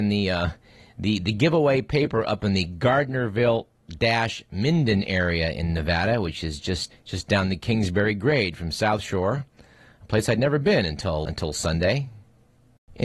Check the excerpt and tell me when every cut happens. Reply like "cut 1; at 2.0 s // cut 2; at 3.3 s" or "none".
cut 1; at 6.9 s // cut 2; at 11.2 s